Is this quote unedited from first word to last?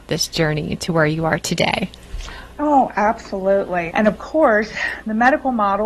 no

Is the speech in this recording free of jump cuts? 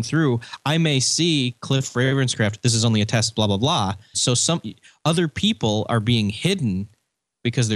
no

